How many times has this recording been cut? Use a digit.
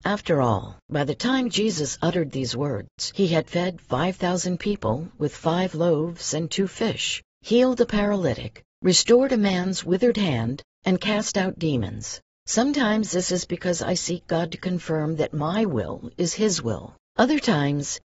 1